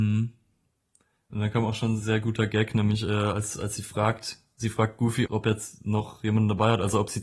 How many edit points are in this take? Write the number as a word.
one